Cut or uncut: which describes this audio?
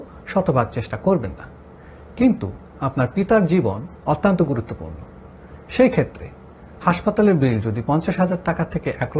uncut